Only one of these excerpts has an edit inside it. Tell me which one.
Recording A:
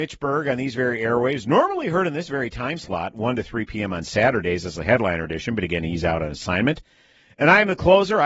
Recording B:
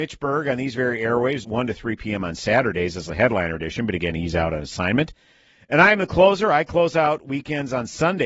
B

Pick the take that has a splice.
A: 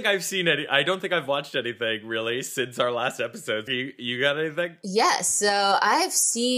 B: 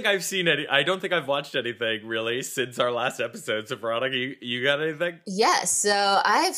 A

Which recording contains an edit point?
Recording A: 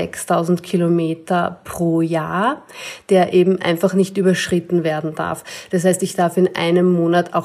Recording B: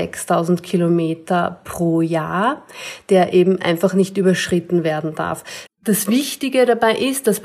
B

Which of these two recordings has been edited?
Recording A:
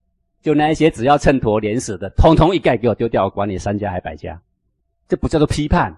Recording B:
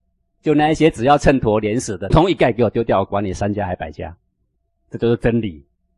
B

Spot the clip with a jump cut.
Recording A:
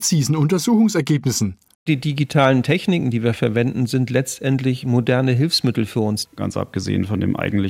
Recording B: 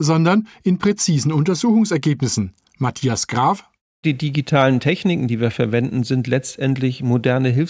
A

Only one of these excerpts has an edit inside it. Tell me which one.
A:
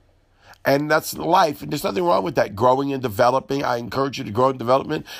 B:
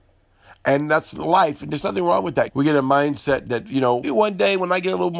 B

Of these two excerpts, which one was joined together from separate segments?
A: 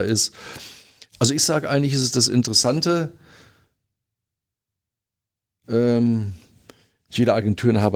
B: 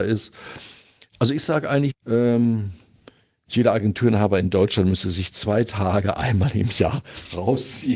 B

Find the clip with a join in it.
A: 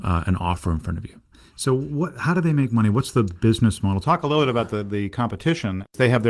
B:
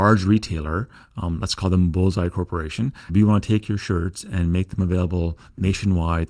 B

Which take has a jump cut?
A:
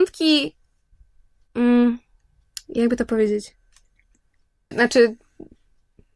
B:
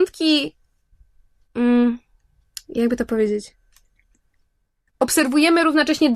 A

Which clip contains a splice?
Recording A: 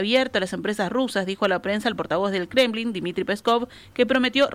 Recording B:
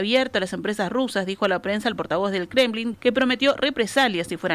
B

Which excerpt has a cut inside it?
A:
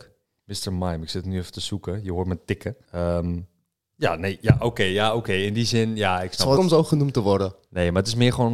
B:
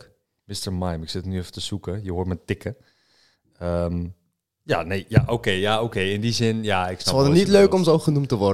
A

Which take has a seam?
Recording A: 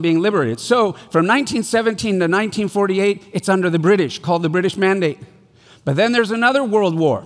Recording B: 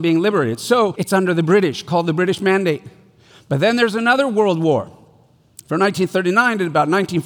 B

